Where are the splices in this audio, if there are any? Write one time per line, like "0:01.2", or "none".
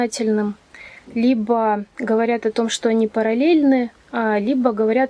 0:04.0